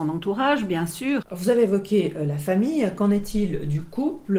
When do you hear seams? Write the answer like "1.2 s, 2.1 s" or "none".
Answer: 1.2 s